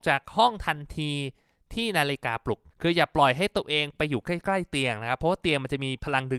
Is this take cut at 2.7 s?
yes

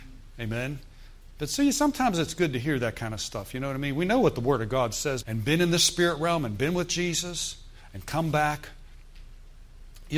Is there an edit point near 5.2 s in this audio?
yes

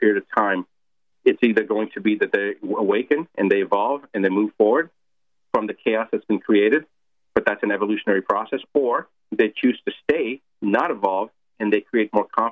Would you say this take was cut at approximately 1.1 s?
yes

